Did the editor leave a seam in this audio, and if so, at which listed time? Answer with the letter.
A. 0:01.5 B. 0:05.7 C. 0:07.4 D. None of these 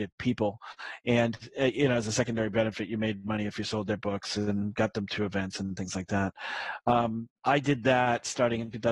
C